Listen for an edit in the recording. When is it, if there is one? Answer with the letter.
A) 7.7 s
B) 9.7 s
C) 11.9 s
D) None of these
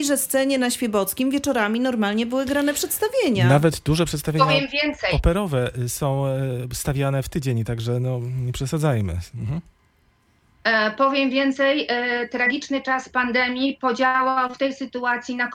D